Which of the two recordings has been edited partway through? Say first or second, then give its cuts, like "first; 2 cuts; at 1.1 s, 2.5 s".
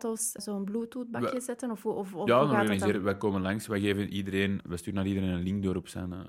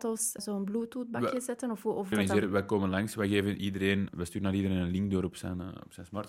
second; 1 cut; at 2.1 s